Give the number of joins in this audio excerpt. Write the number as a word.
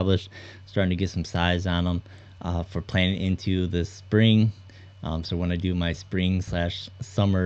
one